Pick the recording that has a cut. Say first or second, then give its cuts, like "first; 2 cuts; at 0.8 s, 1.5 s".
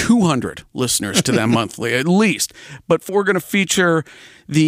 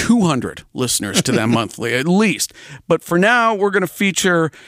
first; 1 cut; at 3.1 s